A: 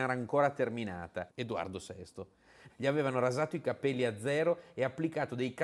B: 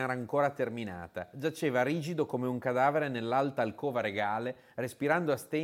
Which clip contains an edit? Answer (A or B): A